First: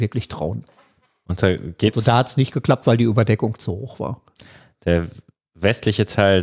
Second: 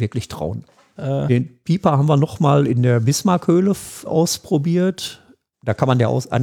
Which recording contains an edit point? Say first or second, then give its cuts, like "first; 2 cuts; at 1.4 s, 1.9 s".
second; 3 cuts; at 1.0 s, 4.1 s, 5.5 s